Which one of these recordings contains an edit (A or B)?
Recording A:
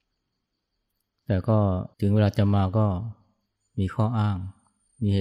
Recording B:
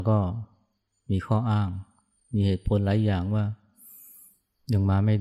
A